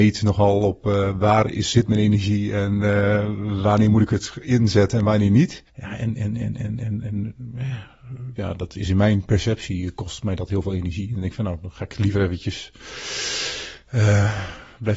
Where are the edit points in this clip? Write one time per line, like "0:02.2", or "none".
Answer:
0:05.7
0:08.4